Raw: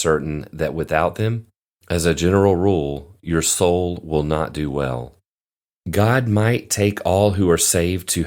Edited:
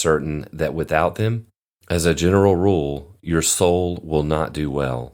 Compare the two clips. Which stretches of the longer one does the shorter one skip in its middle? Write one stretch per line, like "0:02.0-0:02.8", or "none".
none